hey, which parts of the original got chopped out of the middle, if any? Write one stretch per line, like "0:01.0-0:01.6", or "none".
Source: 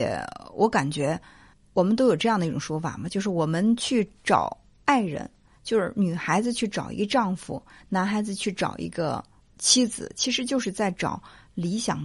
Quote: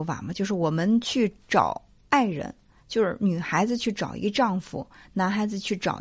none